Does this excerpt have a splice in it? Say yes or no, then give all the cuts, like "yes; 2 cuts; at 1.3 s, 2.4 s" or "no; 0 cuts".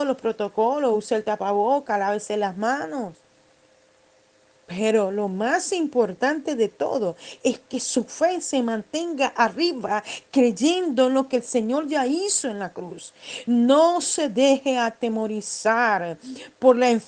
no; 0 cuts